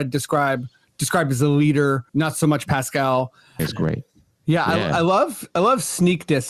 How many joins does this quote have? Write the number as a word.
two